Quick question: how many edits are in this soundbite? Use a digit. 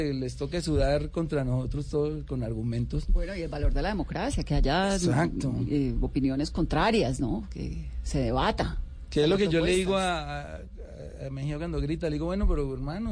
0